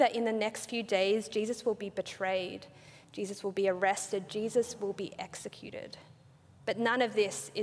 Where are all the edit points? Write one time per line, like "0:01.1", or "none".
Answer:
none